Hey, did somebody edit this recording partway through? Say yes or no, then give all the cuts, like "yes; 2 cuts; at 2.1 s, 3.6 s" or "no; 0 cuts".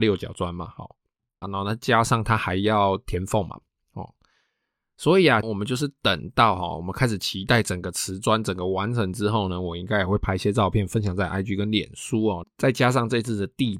yes; 3 cuts; at 1.4 s, 5.4 s, 12.4 s